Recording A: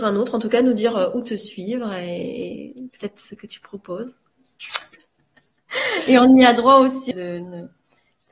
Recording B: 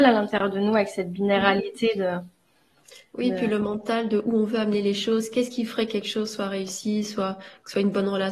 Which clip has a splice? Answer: A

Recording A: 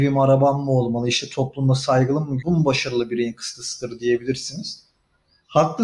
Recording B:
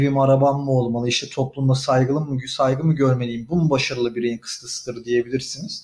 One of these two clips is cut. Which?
A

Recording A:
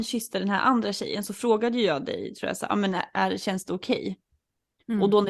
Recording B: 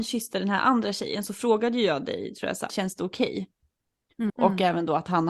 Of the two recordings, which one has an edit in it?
B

